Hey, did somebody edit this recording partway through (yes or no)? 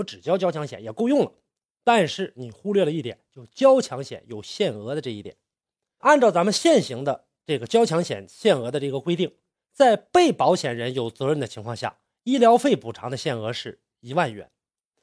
yes